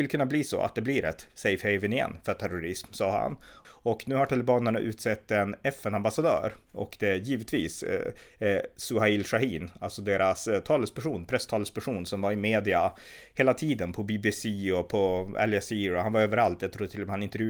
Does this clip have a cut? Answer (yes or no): yes